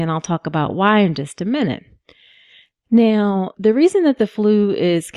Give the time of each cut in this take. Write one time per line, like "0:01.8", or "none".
none